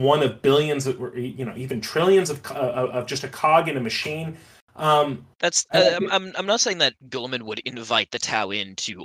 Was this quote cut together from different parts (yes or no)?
yes